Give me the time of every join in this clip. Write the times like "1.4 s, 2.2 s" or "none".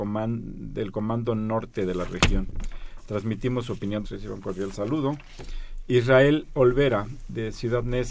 4.0 s